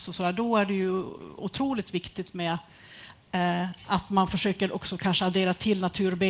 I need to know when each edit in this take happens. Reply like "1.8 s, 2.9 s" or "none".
none